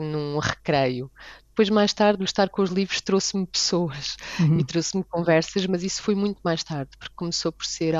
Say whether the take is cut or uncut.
uncut